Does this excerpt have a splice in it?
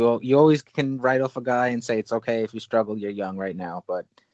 no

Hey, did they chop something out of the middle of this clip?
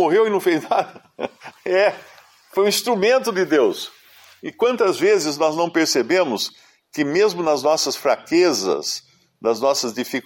no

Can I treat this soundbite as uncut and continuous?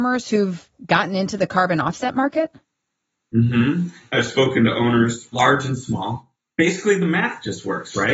yes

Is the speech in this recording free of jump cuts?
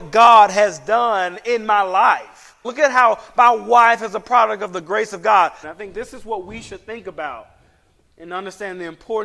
no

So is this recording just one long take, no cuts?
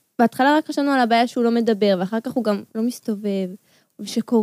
no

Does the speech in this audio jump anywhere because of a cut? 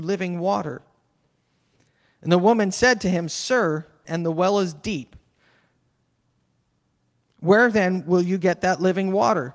yes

